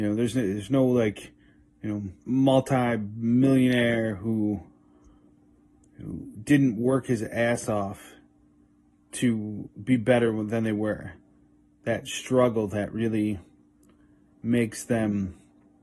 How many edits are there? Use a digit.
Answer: 2